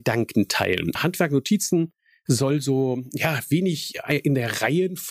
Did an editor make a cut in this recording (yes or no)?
yes